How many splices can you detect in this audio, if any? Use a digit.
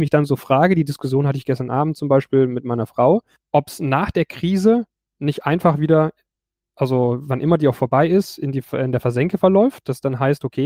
0